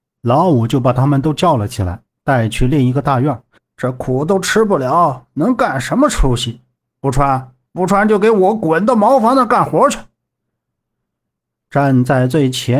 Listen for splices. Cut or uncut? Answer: cut